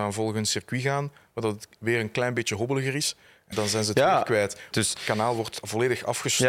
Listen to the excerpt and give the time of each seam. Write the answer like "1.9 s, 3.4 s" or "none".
3.5 s, 4.7 s